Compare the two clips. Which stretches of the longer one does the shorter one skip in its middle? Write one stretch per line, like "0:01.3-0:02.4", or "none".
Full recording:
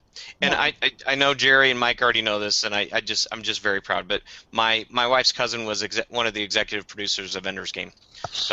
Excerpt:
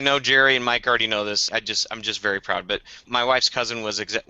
0:02.6-0:02.9
0:04.5-0:04.9